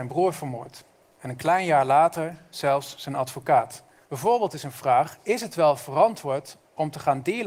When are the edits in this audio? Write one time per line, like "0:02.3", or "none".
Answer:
0:04.0